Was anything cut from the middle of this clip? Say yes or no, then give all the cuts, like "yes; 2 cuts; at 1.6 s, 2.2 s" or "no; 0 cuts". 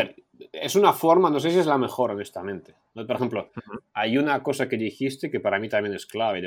no; 0 cuts